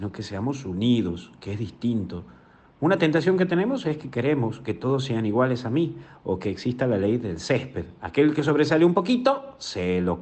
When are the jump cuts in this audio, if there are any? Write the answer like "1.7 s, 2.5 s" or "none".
none